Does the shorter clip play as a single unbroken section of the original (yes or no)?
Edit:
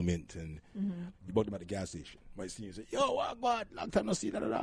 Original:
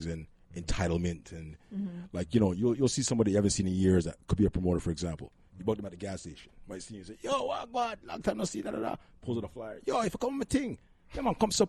no